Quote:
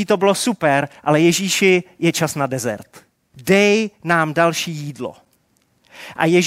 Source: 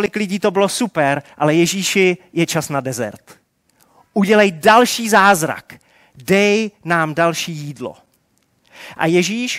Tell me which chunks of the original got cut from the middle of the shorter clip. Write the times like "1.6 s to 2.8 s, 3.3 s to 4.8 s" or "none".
3.7 s to 6.1 s